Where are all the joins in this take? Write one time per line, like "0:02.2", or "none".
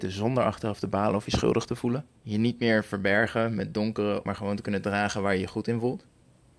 0:02.2
0:04.3